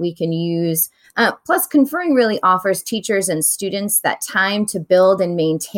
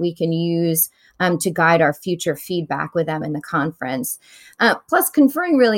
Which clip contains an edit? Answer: first; 1 cut; at 1.0 s

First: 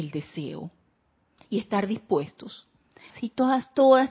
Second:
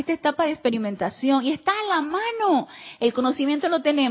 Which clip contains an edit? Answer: first; 1 cut; at 3.1 s

